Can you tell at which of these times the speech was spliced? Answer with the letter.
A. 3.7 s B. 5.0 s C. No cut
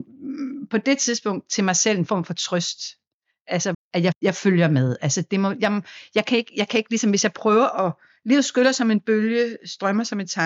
A